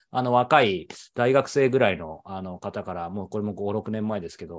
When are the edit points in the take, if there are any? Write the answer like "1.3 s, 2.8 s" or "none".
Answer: none